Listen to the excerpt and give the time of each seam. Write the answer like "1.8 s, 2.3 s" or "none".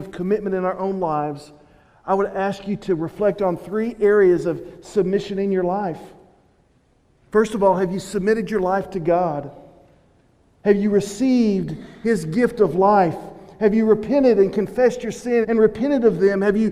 15.4 s